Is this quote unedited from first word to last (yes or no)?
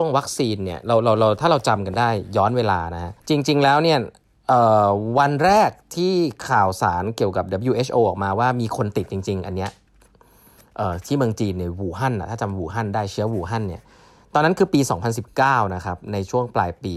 no